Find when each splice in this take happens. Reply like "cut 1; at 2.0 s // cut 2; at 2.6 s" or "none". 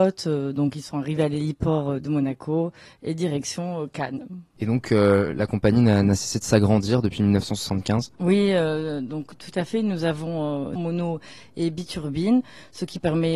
cut 1; at 8.2 s // cut 2; at 10.8 s